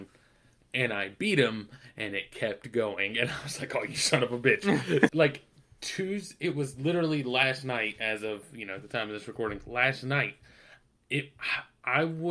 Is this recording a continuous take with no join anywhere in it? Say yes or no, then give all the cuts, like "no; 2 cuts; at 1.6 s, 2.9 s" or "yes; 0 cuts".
no; 1 cut; at 5.1 s